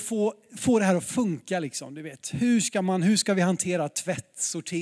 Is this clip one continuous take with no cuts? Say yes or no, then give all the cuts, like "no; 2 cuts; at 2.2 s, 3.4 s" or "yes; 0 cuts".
yes; 0 cuts